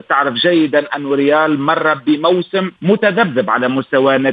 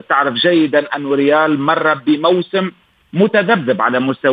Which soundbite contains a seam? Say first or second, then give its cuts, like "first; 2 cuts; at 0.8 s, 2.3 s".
first; 1 cut; at 2.8 s